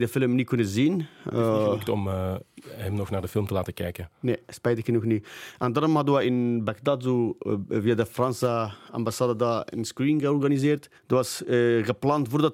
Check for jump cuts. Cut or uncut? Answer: cut